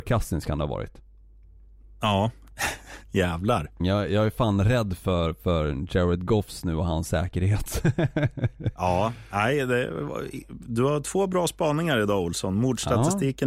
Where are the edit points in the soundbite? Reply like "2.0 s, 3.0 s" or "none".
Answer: 3.8 s

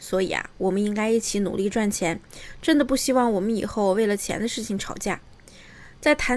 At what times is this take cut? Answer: none

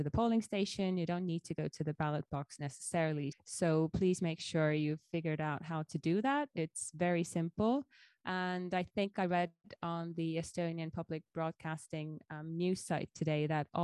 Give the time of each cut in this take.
3.3 s

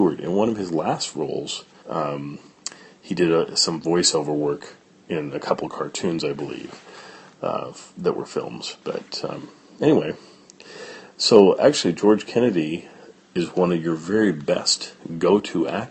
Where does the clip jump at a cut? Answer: 1.8 s

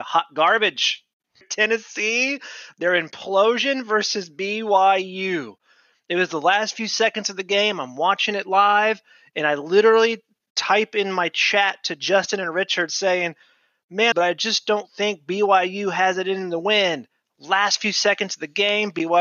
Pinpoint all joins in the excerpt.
1.4 s, 14.1 s

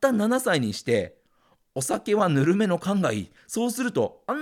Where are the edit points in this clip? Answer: 3.4 s

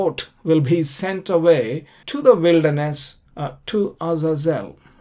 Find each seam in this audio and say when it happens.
2.0 s, 3.2 s

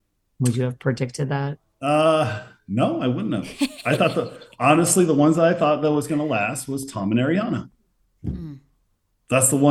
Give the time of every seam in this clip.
none

